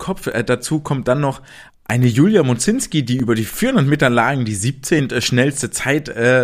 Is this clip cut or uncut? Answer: uncut